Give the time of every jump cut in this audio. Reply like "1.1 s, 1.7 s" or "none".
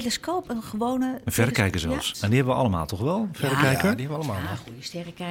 2.1 s